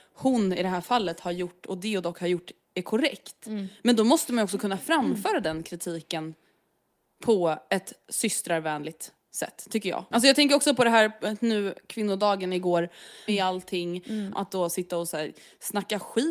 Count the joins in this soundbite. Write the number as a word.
three